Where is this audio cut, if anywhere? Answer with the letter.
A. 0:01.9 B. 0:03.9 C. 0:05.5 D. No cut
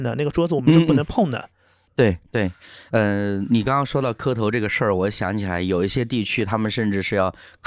A